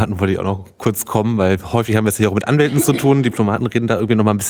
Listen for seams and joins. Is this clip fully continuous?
yes; 0 cuts

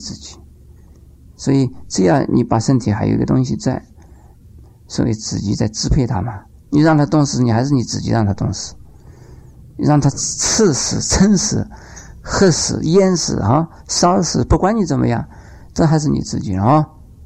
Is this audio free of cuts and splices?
yes; 0 cuts

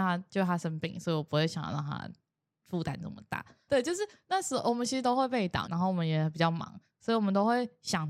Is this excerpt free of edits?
no; 3 cuts; at 3.7 s, 5.6 s, 6.9 s

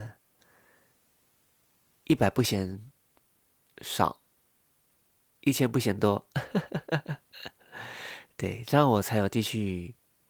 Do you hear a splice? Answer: no; 0 cuts

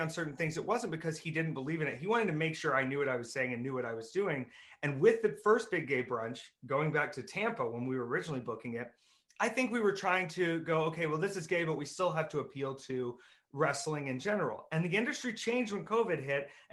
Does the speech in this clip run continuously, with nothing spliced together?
yes; 0 cuts

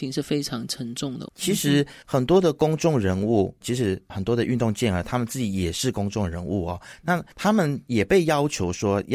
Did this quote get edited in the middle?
yes; 2 cuts; at 1.3 s, 3.6 s

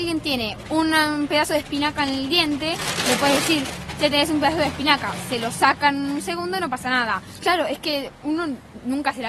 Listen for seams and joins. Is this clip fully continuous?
no; 1 cut; at 7.4 s

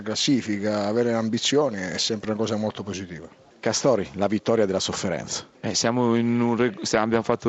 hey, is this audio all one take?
no; 1 cut; at 5.5 s

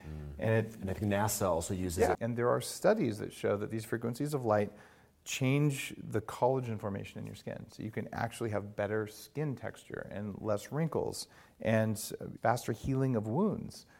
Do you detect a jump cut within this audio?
yes; 2 cuts; at 2.1 s, 12.4 s

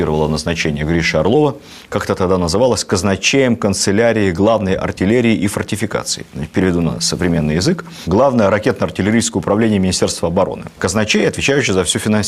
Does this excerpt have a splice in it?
no; 0 cuts

